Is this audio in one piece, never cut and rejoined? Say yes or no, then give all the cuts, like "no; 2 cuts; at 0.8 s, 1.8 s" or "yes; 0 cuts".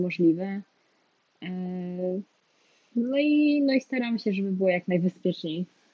yes; 0 cuts